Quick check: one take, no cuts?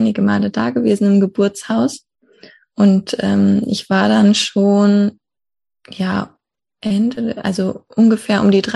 yes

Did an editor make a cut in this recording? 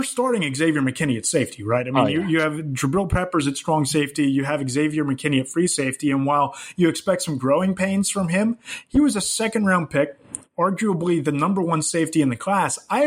no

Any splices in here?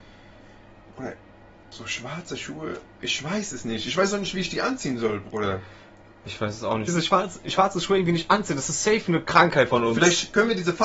yes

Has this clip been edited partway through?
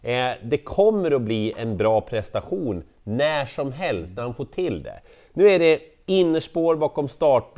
no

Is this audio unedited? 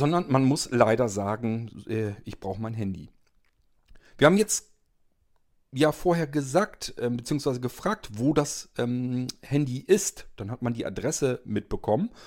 no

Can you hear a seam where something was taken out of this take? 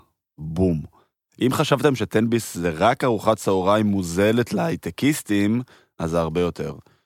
no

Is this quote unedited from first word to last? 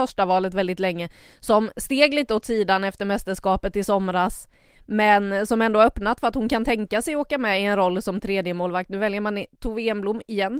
yes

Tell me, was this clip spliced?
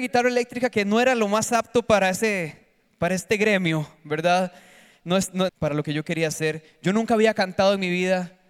yes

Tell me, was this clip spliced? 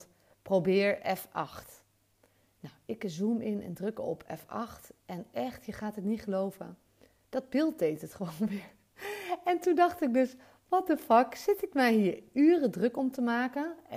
no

